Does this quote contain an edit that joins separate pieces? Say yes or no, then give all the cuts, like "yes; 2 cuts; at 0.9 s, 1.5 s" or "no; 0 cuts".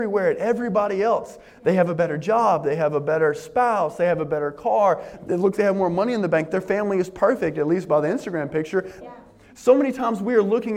yes; 2 cuts; at 5.6 s, 9.0 s